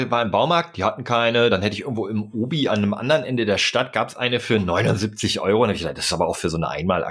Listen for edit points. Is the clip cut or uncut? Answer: uncut